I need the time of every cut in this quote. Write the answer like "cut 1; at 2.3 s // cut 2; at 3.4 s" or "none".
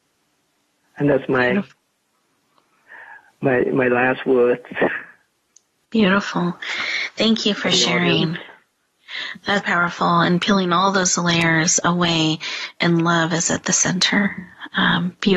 cut 1; at 9.6 s